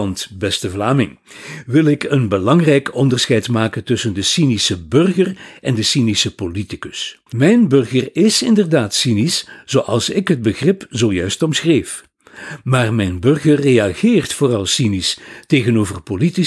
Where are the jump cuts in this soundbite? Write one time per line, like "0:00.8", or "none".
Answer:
0:07.3

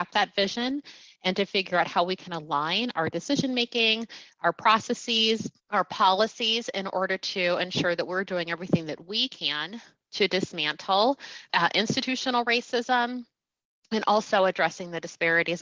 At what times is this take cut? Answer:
0:05.6
0:11.5

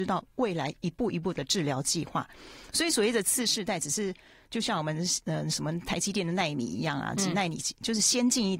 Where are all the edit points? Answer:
none

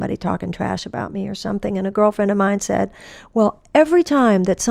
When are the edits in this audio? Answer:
none

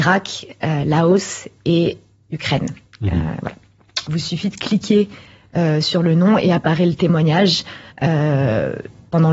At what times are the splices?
0:04.0
0:07.9

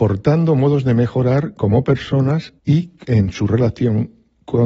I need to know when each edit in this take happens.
0:02.6

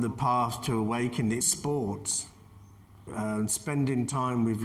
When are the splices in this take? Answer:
0:01.4
0:03.1

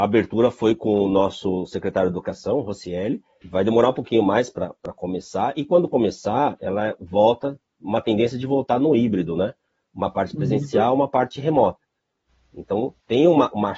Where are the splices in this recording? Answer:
0:03.4

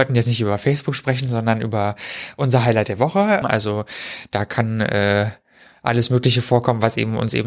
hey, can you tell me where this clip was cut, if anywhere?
0:03.4

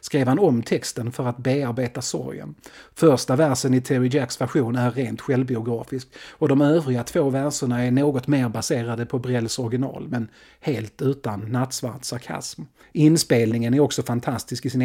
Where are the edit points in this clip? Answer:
0:12.8

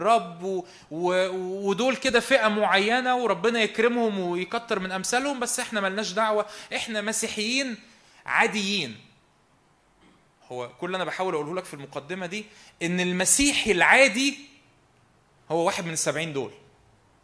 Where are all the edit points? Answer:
none

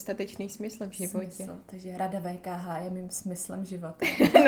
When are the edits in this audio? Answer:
none

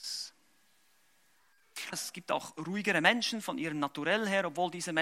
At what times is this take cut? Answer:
0:01.9

